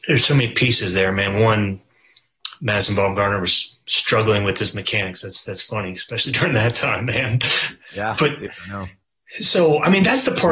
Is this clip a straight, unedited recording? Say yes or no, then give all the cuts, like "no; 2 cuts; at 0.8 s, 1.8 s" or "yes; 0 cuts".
yes; 0 cuts